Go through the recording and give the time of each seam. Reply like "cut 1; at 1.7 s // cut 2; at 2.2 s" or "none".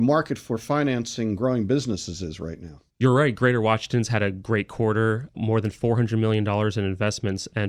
cut 1; at 2.9 s // cut 2; at 5.3 s